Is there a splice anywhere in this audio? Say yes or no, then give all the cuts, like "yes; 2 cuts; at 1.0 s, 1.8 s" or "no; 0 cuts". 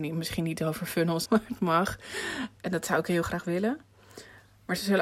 yes; 2 cuts; at 1.3 s, 2.6 s